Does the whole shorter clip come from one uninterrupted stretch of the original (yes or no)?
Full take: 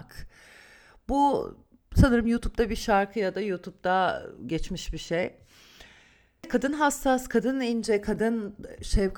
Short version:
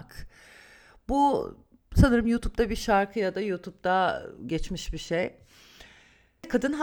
yes